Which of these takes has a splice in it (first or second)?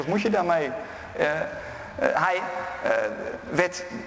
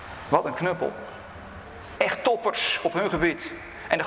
second